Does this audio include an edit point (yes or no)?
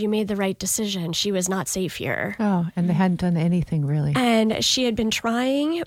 no